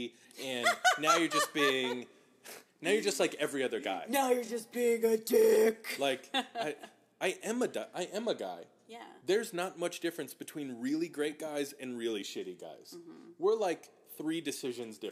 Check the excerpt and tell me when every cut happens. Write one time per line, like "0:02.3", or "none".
none